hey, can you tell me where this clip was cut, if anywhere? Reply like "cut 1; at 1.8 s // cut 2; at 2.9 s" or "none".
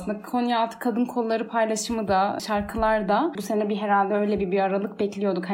cut 1; at 3.4 s